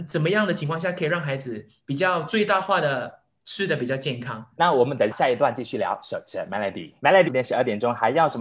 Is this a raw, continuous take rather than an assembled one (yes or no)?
no